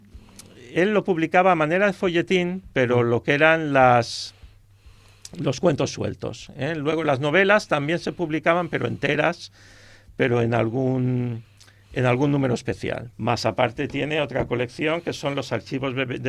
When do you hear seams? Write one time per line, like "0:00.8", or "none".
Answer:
0:13.1